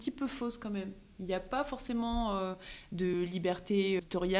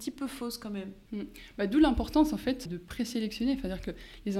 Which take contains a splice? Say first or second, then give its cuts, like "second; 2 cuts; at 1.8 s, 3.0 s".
second; 2 cuts; at 1.1 s, 2.7 s